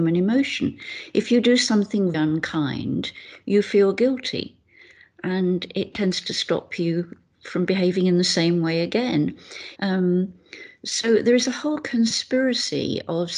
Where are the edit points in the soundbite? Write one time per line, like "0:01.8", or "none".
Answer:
0:02.1
0:09.8